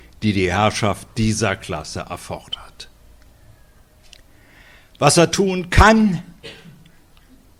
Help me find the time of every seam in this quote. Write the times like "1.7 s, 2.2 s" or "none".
none